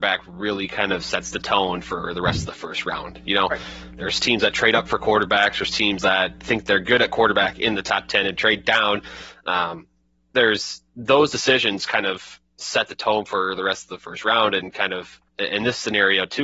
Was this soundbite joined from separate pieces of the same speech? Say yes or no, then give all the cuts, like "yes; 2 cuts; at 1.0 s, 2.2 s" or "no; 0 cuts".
yes; 1 cut; at 15.3 s